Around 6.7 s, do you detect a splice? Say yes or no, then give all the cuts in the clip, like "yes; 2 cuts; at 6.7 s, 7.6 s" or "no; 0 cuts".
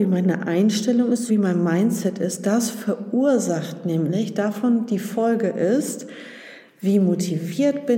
no; 1 cut; at 1.3 s